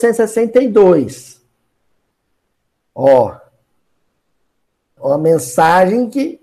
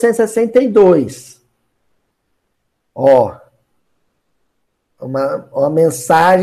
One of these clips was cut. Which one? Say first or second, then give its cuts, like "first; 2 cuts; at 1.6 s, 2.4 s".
first; 1 cut; at 5.0 s